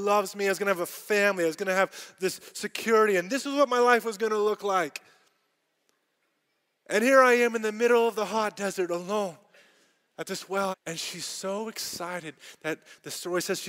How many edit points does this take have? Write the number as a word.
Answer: one